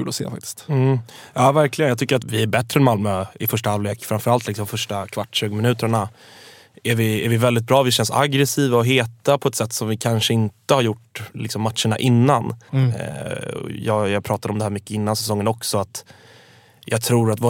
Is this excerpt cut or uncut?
cut